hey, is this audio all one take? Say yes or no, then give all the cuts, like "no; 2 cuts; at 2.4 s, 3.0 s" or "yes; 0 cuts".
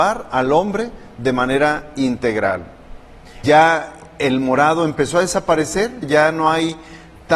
no; 2 cuts; at 3.4 s, 6.0 s